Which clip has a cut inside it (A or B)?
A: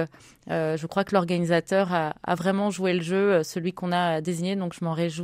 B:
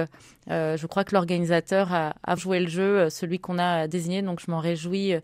B